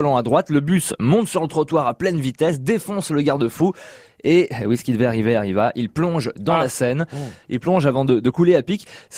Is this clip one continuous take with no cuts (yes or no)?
yes